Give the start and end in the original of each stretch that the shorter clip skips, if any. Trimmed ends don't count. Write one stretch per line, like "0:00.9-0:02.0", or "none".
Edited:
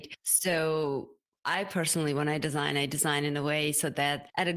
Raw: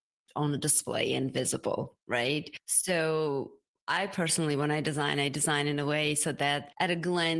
none